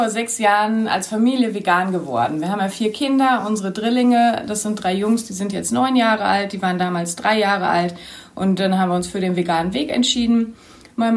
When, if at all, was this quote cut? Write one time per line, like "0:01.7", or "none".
none